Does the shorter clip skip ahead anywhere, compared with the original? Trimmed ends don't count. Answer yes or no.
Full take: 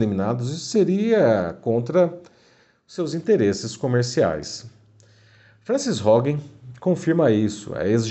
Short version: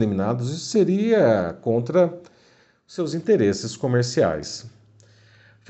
no